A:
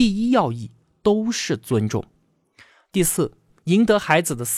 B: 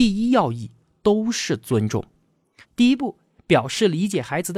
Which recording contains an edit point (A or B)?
B